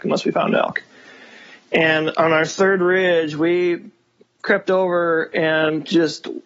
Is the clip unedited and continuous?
yes; 0 cuts

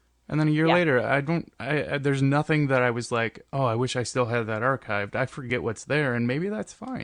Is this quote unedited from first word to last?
yes; 0 cuts

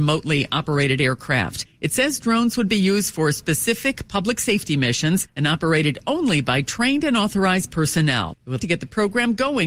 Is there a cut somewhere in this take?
yes; 1 cut; at 8.6 s

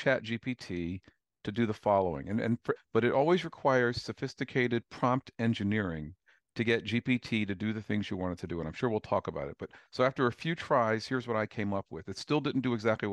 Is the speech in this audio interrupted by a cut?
yes; 1 cut; at 2.8 s

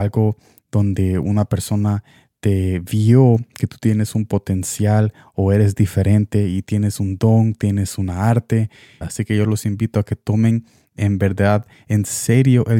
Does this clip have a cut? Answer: yes; 1 cut; at 9.0 s

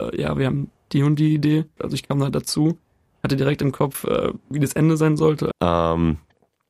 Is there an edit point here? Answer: yes; 2 cuts; at 1.8 s, 5.5 s

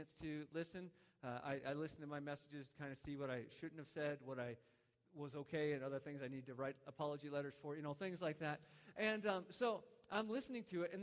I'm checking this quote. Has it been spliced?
no; 0 cuts

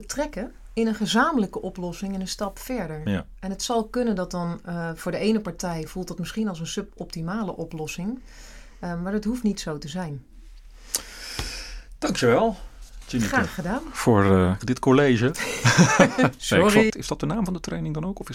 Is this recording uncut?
no; 2 cuts; at 14.6 s, 16.9 s

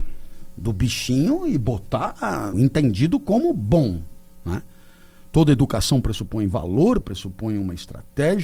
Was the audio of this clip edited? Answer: yes; 2 cuts; at 2.5 s, 7.0 s

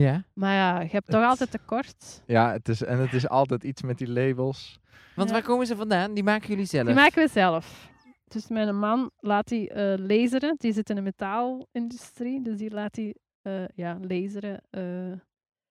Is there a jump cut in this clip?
no; 0 cuts

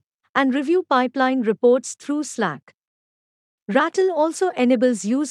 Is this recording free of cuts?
yes; 0 cuts

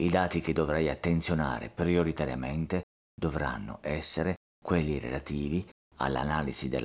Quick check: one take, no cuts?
yes; 0 cuts

